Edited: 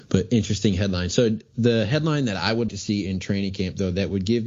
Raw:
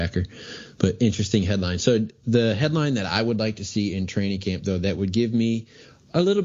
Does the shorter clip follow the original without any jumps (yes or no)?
no